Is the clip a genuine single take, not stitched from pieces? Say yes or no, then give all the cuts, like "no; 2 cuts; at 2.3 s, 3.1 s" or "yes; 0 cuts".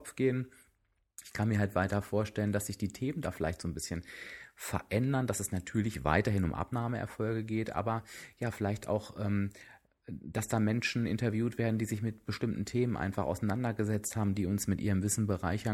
yes; 0 cuts